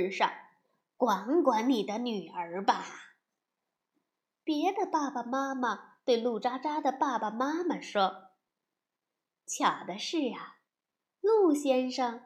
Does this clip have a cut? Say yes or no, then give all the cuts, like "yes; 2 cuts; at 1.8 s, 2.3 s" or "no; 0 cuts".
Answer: no; 0 cuts